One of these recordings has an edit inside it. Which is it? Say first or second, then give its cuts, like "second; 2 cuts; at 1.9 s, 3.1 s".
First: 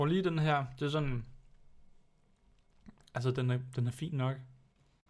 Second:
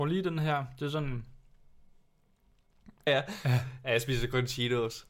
second; 1 cut; at 3.1 s